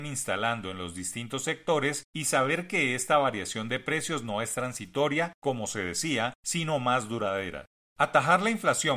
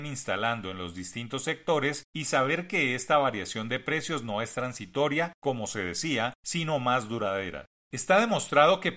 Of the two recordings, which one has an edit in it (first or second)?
second